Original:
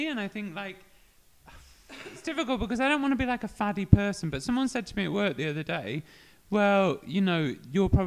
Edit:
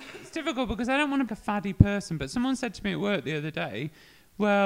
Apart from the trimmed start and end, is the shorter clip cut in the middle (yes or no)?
yes